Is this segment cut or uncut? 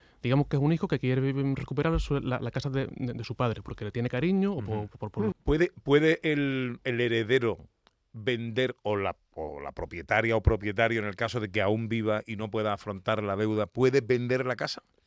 cut